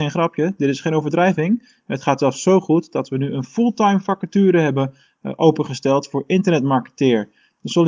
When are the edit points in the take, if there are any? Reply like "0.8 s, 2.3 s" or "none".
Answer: none